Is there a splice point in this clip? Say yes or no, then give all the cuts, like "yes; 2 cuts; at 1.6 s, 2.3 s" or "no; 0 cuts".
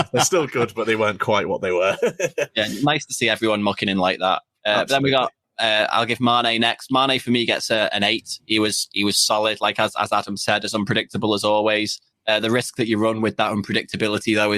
no; 0 cuts